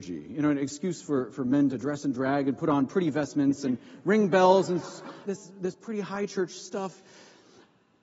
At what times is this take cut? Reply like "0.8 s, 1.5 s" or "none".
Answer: 1.7 s, 5.2 s